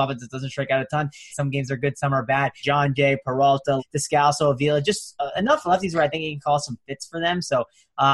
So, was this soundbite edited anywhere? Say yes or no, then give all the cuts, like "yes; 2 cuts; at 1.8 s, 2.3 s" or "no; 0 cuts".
yes; 3 cuts; at 1.3 s, 2.6 s, 3.8 s